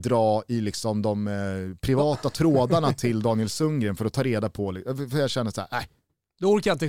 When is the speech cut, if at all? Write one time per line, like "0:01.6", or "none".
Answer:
none